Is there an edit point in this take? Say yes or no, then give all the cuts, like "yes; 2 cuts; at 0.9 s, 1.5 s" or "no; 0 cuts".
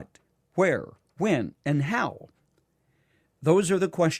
no; 0 cuts